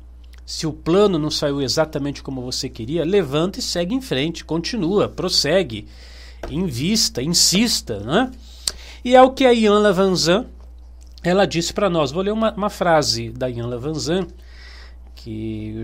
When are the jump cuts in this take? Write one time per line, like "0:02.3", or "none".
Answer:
none